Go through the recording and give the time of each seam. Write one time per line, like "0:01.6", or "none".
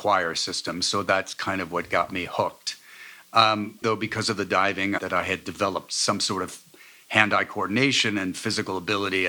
0:03.8
0:05.0